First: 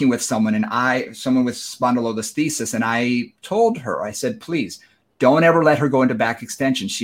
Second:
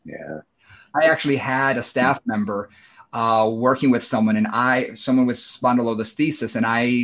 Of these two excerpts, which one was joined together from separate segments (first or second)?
second